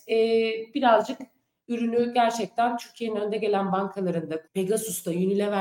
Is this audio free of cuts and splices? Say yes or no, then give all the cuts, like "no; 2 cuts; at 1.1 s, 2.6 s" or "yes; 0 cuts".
no; 1 cut; at 4.5 s